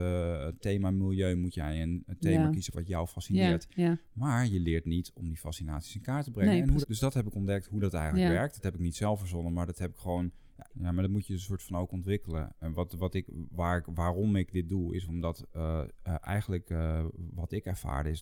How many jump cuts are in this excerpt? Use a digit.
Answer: 2